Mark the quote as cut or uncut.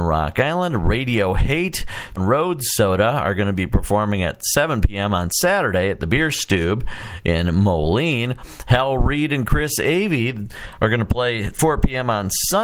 cut